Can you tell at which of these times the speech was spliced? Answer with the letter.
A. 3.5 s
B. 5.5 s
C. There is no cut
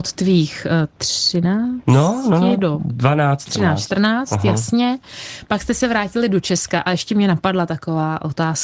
A